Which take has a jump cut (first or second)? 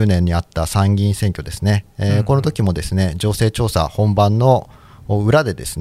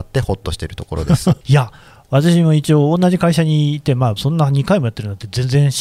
second